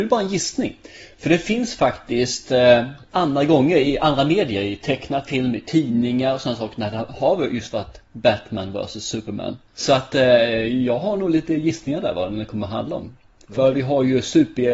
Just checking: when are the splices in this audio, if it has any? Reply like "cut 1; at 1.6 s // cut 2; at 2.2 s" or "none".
none

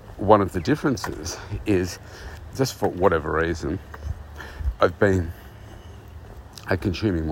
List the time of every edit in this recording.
cut 1; at 2.5 s

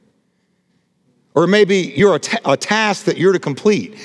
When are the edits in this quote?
none

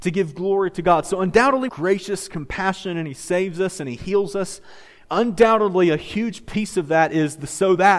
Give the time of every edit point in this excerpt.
cut 1; at 1.7 s

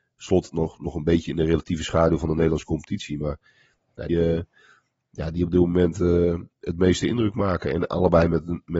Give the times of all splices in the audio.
cut 1; at 4.1 s

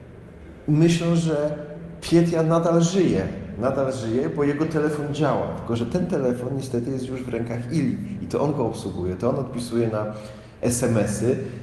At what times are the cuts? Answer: none

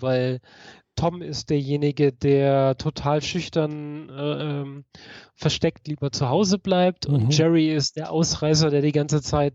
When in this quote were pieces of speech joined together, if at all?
none

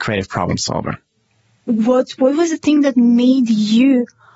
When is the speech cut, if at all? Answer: none

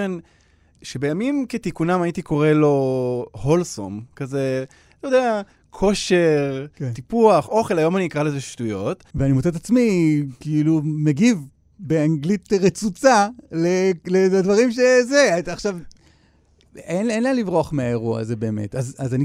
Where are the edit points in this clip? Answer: cut 1; at 9.1 s

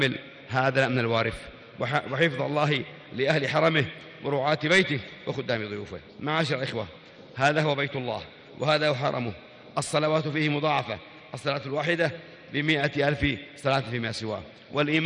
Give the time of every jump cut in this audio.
cut 1; at 6.1 s

